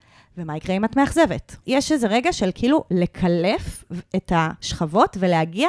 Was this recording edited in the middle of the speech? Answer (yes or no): yes